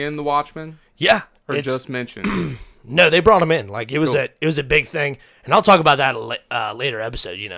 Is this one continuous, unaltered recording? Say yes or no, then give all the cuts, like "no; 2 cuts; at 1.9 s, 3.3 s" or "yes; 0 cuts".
yes; 0 cuts